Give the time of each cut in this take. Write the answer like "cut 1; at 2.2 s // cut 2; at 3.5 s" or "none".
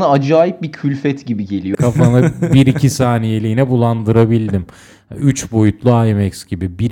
cut 1; at 1.7 s